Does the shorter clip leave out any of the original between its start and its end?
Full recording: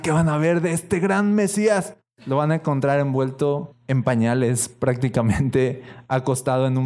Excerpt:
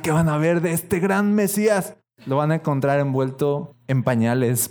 no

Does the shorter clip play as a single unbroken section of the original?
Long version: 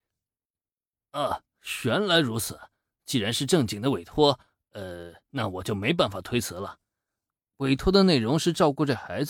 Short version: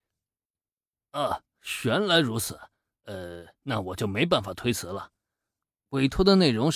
no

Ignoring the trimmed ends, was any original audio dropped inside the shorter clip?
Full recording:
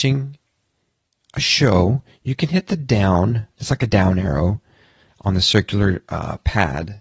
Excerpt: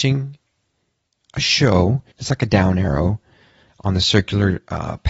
yes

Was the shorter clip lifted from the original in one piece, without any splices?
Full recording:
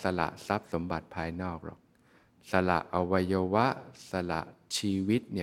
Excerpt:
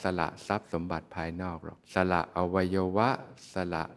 no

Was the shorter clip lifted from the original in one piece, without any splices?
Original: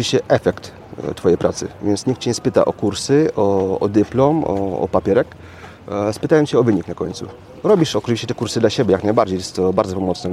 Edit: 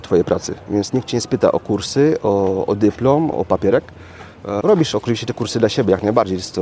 no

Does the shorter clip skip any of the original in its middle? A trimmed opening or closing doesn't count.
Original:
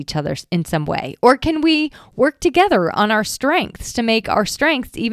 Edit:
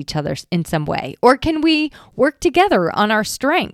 no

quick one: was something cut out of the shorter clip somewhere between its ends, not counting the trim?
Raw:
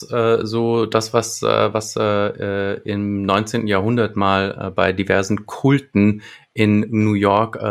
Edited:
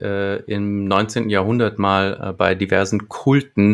no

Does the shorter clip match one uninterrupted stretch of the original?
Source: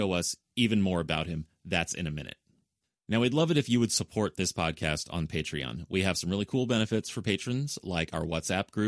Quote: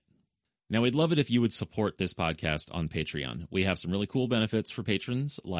yes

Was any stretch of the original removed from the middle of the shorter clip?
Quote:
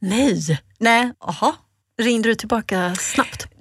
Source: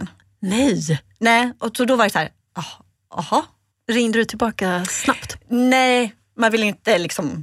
yes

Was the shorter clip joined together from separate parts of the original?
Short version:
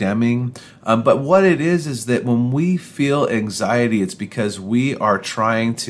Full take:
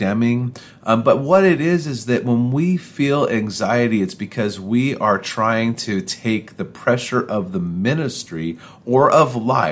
no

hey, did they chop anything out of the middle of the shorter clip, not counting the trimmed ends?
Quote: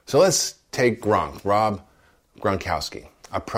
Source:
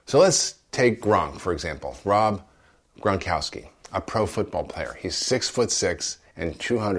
yes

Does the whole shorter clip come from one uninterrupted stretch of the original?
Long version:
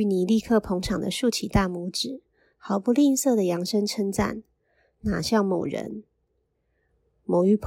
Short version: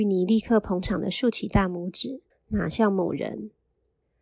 no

